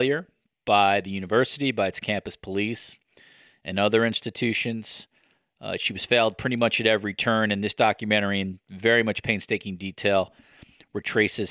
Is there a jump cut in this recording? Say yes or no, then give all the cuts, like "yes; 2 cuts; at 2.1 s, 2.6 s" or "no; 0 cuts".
no; 0 cuts